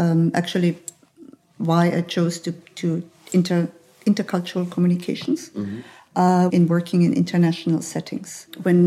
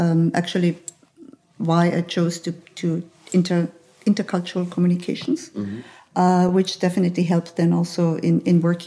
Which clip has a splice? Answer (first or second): first